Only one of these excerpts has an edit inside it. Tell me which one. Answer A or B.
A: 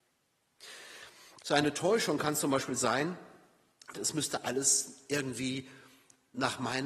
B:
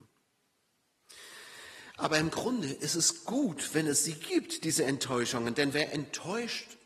A